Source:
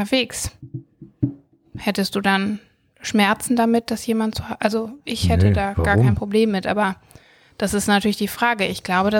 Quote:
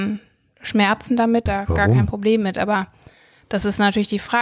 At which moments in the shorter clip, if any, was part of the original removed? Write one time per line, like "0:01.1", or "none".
0:01.5